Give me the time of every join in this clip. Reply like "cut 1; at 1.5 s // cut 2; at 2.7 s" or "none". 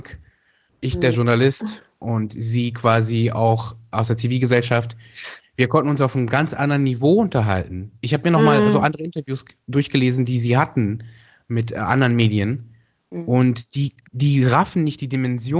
none